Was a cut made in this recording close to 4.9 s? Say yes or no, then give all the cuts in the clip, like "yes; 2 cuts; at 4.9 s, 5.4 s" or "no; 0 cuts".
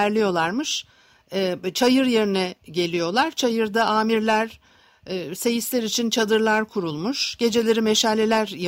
no; 0 cuts